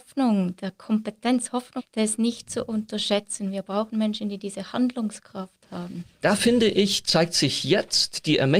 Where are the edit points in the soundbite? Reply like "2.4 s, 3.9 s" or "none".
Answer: 1.8 s, 6.2 s